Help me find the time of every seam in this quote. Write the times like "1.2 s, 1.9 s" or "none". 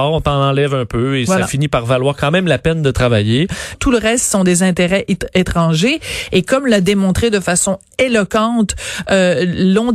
3.7 s